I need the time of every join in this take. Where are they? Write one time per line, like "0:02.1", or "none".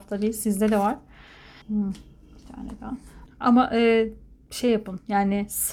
0:01.6
0:03.3